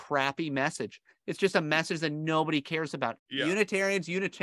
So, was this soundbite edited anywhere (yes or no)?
yes